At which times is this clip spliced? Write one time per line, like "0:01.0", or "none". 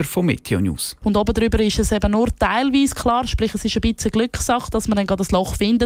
0:01.0

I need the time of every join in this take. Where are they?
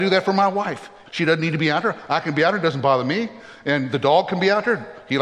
0:01.0

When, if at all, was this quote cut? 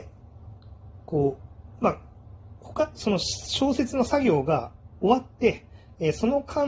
none

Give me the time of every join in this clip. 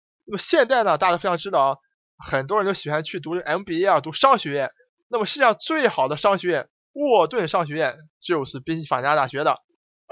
none

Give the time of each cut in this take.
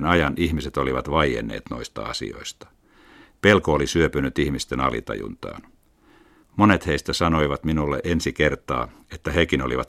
0:06.4

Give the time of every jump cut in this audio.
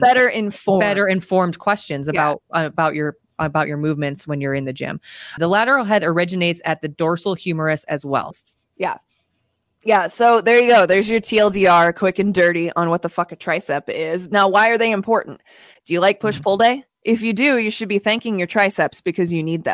0:05.4
0:08.3

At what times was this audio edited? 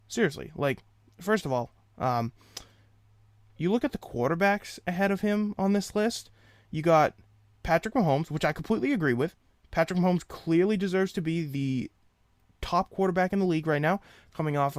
none

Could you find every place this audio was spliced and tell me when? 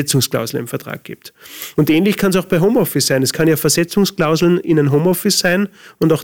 none

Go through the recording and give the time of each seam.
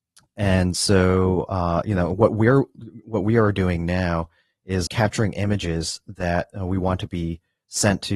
0:04.9

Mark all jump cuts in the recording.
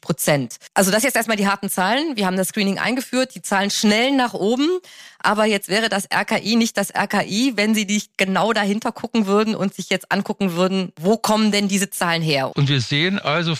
0:12.5

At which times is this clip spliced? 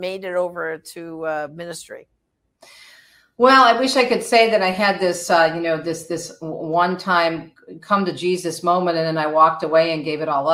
none

